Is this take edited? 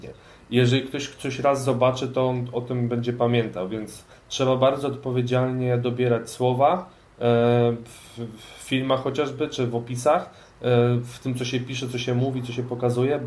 no; 0 cuts

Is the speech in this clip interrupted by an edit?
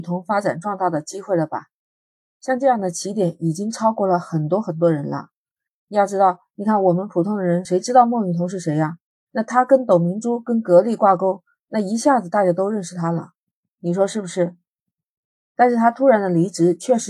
no; 0 cuts

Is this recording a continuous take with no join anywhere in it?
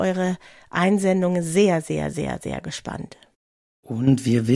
yes; 0 cuts

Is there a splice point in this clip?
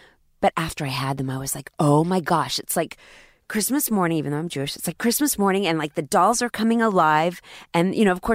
no; 0 cuts

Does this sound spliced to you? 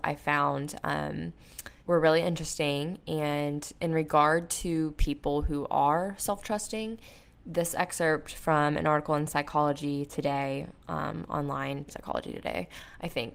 yes; 2 cuts; at 1.8 s, 11.9 s

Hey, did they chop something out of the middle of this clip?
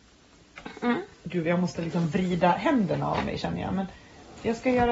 yes; 1 cut; at 1.1 s

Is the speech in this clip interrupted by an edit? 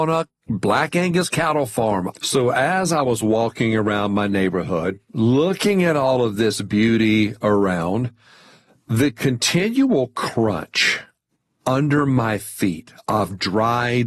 yes; 1 cut; at 2.1 s

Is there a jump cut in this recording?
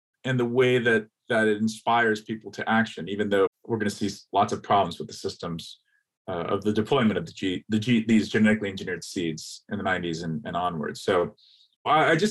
yes; 1 cut; at 3.5 s

